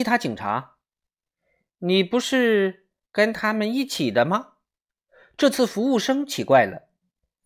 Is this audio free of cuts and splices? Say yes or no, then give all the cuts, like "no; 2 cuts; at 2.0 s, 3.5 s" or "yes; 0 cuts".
yes; 0 cuts